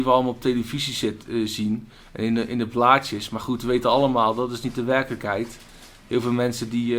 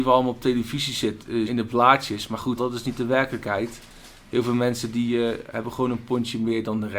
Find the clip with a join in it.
second; 2 cuts; at 1.5 s, 2.6 s

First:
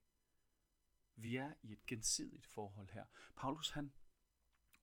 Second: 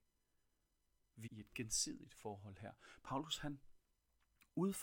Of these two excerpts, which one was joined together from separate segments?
second; 1 cut; at 1.3 s

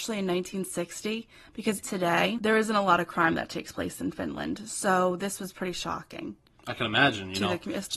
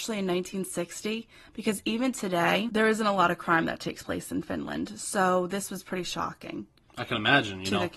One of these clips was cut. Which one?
first; 1 cut; at 1.8 s

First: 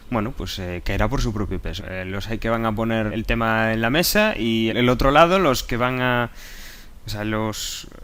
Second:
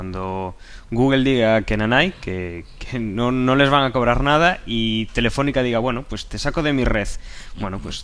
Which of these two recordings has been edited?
first; 3 cuts; at 1.8 s, 3.1 s, 4.7 s

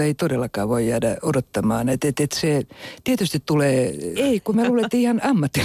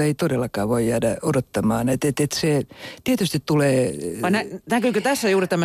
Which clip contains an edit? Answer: first; 1 cut; at 4.2 s

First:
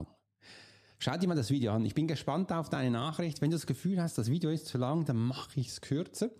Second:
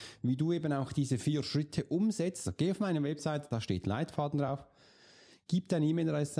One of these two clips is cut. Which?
second; 2 cuts; at 2.4 s, 3.5 s

